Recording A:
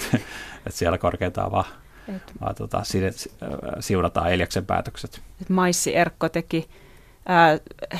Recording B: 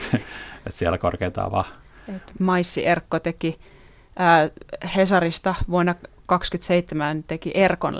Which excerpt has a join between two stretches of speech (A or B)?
B